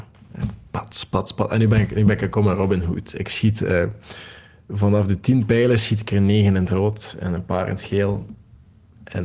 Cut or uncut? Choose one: uncut